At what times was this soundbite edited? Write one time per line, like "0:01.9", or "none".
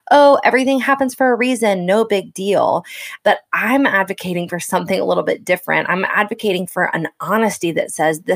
0:03.2